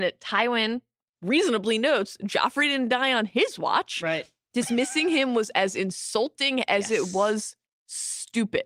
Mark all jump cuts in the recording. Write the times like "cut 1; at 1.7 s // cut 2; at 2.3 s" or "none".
none